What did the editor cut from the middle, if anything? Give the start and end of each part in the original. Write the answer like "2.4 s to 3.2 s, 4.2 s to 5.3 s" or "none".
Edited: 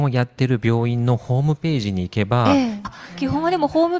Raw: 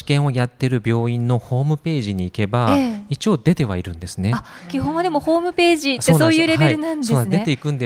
3.1 s to 4.4 s